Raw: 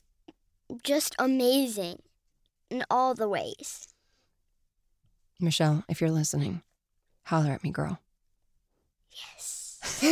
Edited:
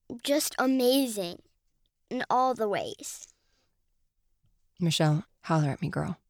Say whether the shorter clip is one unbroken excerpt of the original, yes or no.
no